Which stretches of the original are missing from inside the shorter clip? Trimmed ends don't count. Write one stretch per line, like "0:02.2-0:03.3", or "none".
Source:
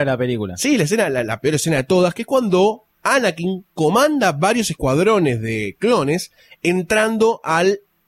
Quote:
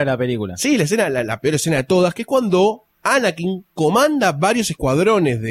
none